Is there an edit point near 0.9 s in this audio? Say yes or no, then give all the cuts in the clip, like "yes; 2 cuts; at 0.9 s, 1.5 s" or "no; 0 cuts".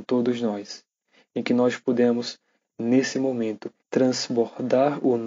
no; 1 cut; at 3.8 s